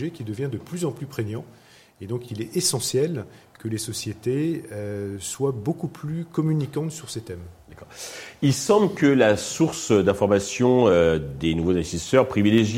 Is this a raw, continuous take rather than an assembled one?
yes; 0 cuts

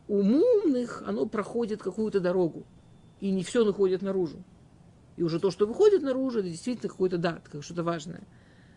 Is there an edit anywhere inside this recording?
no; 0 cuts

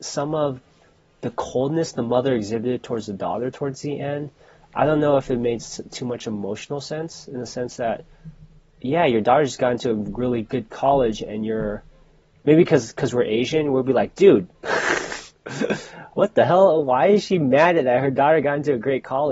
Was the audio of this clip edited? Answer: no; 0 cuts

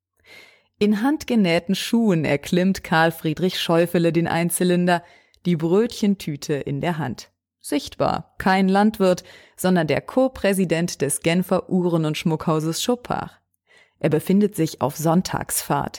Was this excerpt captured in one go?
yes; 0 cuts

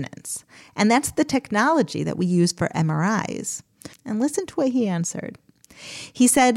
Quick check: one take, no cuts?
no; 1 cut; at 3.9 s

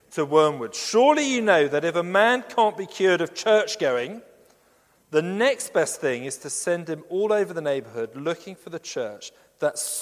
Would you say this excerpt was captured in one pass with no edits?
yes; 0 cuts

